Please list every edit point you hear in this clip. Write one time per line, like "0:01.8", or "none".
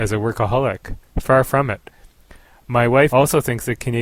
0:03.1